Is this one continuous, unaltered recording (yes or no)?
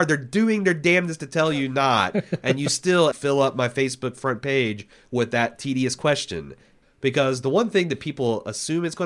no